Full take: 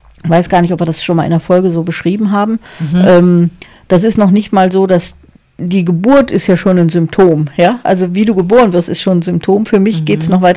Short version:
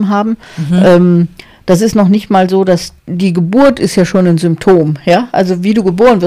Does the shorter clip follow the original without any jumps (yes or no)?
no